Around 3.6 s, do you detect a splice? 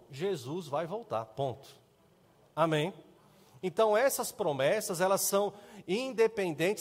no; 0 cuts

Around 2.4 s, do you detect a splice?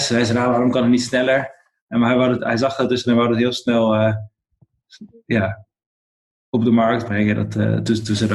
no; 0 cuts

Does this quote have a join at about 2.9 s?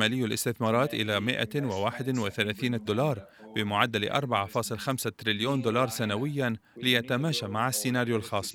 yes; 1 cut; at 2.9 s

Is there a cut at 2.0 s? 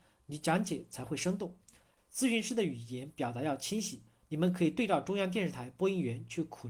yes; 1 cut; at 2.0 s

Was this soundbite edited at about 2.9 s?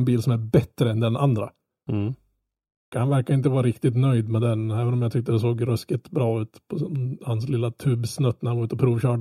yes; 1 cut; at 2.9 s

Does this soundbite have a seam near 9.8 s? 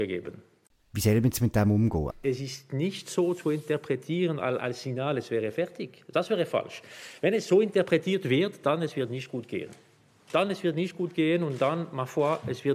no; 1 cut; at 2.1 s

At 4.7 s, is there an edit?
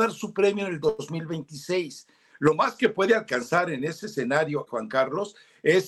yes; 1 cut; at 4.7 s

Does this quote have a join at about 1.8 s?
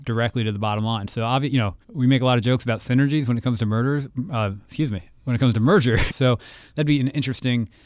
yes; 2 cuts; at 1.8 s, 6.1 s

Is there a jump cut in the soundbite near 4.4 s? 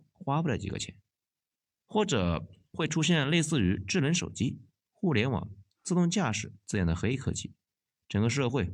no; 1 cut; at 1.6 s

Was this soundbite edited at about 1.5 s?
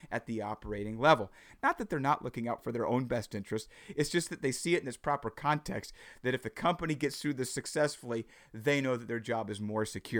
yes; 1 cut; at 1.5 s

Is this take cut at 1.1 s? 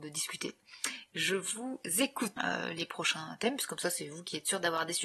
no; 1 cut; at 2.4 s

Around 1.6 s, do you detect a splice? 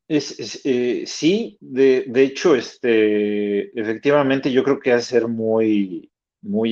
no; 0 cuts

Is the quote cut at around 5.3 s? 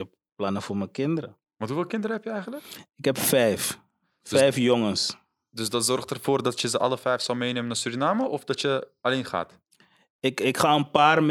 no; 0 cuts

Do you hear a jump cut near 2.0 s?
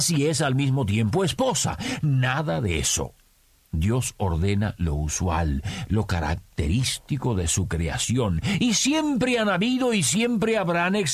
no; 1 cut; at 5.9 s

